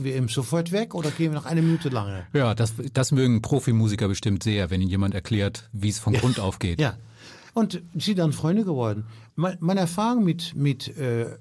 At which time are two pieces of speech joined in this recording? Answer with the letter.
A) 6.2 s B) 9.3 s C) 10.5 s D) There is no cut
B